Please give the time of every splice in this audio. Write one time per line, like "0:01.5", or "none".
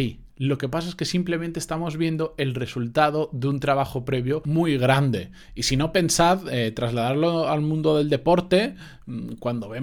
none